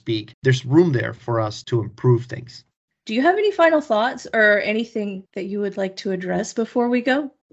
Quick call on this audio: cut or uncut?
uncut